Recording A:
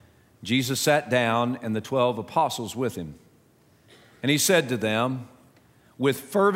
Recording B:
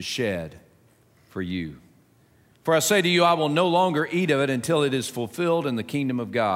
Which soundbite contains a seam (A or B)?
B